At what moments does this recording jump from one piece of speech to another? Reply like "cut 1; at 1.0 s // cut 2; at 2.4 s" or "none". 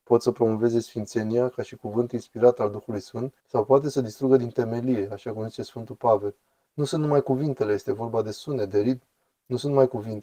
cut 1; at 3.4 s // cut 2; at 6.6 s